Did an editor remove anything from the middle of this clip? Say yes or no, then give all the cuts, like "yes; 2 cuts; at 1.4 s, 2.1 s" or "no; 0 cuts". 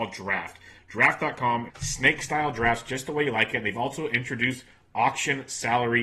yes; 1 cut; at 1.7 s